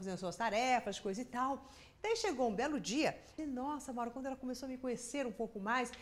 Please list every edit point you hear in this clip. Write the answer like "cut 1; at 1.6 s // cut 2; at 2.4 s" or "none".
cut 1; at 3.4 s